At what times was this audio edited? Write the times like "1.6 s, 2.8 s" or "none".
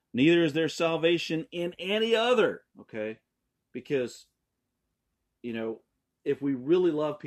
2.7 s